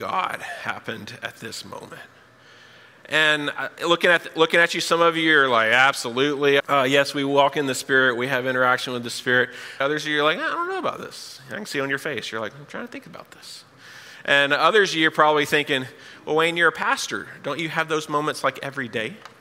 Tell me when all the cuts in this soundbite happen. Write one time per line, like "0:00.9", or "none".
0:06.6
0:09.8